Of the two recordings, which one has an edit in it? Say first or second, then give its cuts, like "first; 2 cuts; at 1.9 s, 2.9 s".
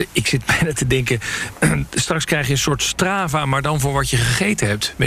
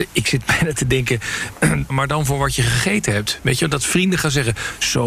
second; 1 cut; at 1.9 s